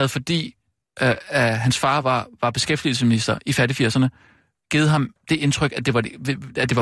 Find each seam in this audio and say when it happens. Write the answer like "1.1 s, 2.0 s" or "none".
none